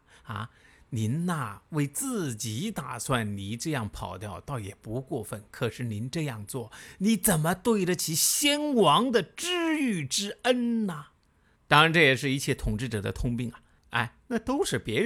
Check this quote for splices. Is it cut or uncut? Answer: cut